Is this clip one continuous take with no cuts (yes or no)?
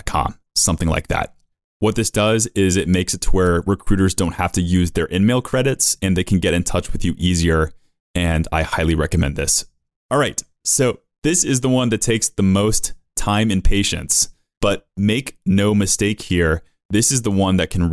no